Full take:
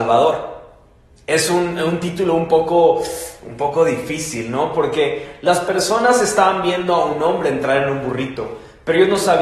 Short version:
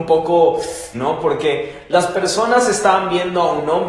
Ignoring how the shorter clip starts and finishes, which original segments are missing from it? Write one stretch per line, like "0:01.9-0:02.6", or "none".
0:03.4-0:04.5